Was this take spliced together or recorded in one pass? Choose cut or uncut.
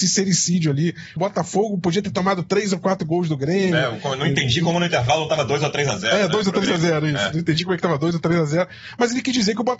cut